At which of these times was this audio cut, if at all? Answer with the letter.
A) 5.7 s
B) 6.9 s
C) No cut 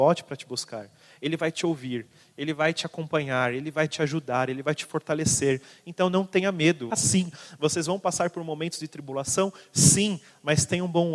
B